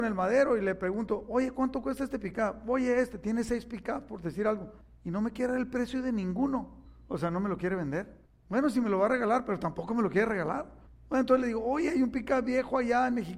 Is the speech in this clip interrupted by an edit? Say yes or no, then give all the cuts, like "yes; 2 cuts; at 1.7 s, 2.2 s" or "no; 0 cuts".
no; 0 cuts